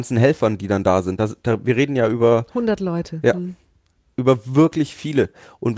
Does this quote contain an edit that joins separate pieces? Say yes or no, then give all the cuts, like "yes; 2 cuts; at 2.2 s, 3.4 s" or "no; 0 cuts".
no; 0 cuts